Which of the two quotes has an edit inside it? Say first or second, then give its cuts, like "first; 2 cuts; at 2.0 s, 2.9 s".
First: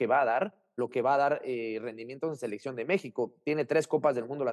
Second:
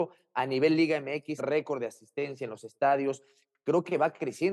second; 1 cut; at 1.4 s